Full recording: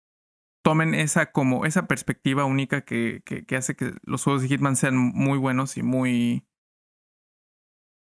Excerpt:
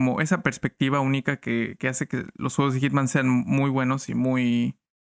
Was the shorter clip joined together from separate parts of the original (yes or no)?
yes